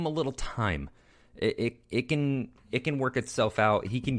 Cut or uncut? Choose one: uncut